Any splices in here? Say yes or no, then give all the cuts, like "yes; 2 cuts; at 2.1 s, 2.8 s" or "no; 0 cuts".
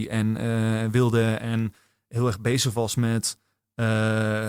no; 0 cuts